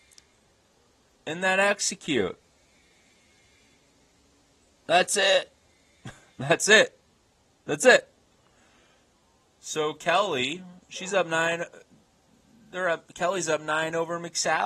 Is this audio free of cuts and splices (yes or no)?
yes